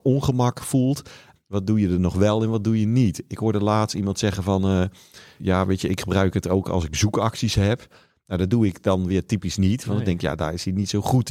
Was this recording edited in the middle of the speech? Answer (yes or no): yes